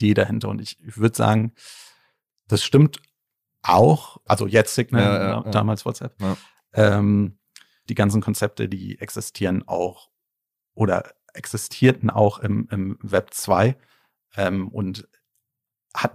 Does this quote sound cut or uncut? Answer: cut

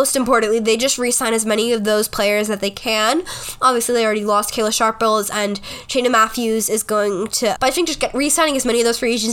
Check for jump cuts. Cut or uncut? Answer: cut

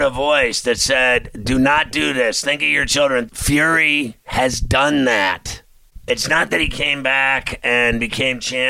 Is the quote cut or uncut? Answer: cut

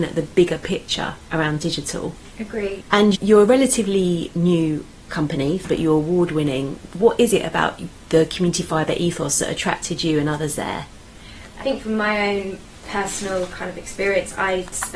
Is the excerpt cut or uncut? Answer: uncut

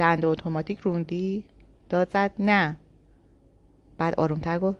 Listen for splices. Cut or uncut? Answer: cut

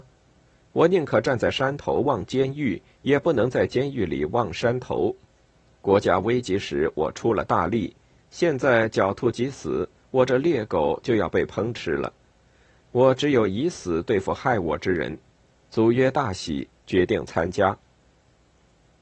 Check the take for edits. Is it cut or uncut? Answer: cut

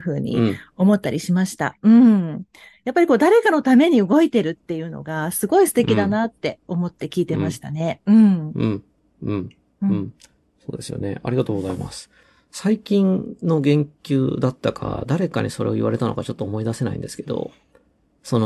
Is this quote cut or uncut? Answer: uncut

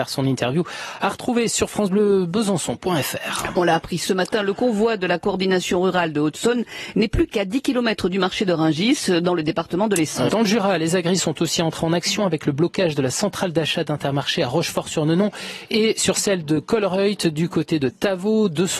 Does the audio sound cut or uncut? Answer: cut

